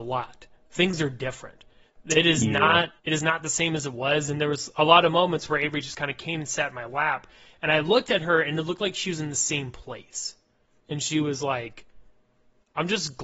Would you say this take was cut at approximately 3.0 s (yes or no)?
yes